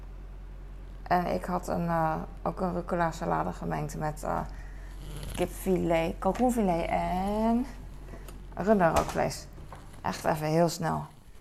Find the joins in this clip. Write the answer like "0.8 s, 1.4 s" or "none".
none